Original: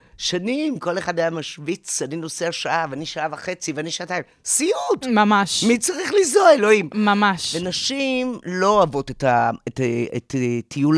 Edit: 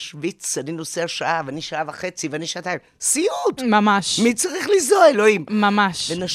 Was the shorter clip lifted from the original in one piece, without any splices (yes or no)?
yes